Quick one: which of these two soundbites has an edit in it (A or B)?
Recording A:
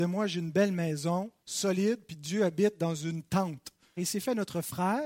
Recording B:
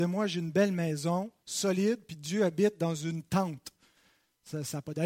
A